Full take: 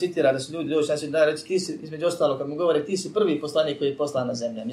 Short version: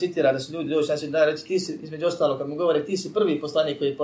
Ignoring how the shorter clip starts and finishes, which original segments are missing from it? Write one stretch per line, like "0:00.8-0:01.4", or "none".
none